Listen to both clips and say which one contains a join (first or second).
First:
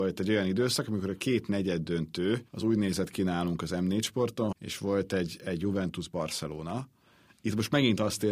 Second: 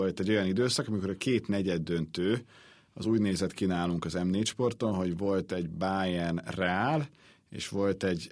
first